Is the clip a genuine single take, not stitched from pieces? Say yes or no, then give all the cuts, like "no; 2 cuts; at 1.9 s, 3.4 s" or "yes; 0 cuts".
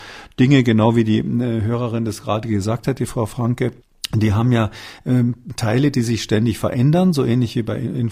yes; 0 cuts